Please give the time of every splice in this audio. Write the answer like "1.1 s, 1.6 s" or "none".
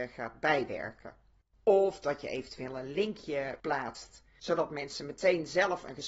1.5 s